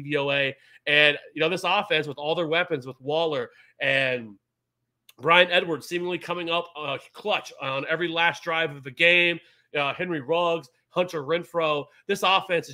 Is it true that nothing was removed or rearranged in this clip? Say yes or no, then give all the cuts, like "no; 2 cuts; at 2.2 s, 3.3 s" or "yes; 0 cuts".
yes; 0 cuts